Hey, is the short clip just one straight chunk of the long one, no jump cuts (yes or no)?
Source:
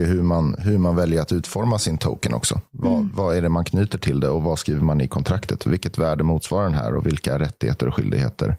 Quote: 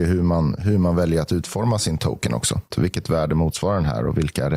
no